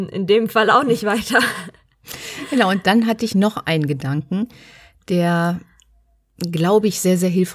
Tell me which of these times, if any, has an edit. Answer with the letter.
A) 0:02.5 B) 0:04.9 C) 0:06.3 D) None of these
D